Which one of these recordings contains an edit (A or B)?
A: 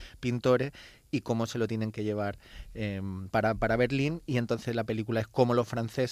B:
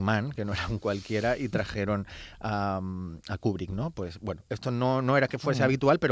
A